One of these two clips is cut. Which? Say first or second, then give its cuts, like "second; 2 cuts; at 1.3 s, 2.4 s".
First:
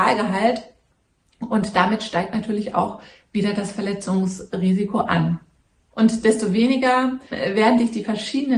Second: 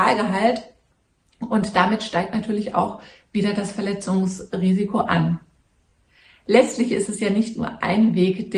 first; 2 cuts; at 5.9 s, 7.3 s